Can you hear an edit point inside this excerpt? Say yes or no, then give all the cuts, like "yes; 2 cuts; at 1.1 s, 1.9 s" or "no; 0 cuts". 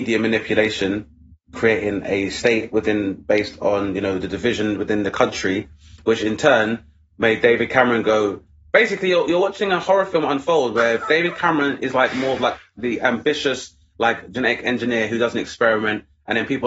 no; 0 cuts